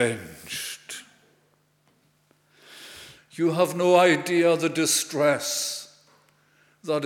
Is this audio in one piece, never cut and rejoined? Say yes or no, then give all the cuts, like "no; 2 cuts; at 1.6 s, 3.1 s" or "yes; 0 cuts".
no; 1 cut; at 3.2 s